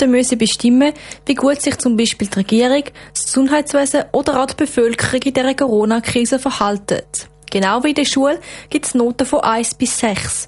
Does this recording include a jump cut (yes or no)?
no